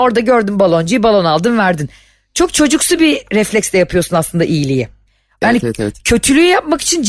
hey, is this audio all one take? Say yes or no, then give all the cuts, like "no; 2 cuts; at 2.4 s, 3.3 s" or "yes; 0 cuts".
yes; 0 cuts